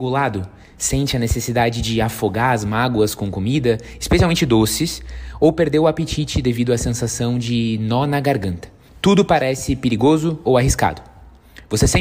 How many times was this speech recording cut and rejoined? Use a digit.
1